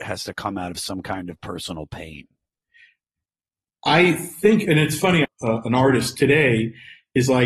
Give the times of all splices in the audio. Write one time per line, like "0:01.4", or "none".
0:05.2